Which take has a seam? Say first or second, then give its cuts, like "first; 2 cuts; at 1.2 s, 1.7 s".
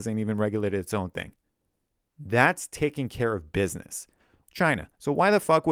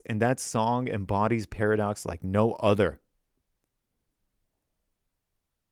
first; 2 cuts; at 2.1 s, 4.4 s